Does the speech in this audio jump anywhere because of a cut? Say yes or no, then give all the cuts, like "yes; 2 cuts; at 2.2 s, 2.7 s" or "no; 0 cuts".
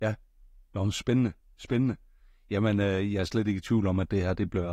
no; 0 cuts